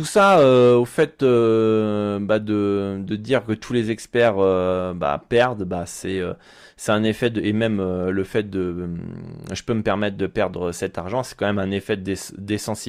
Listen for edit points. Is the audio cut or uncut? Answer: uncut